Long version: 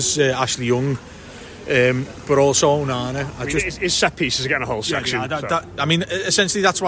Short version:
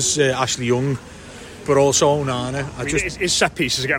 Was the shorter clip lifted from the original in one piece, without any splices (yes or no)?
no